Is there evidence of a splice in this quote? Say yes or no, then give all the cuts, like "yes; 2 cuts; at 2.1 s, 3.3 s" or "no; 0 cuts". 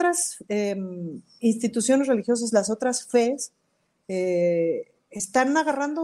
no; 0 cuts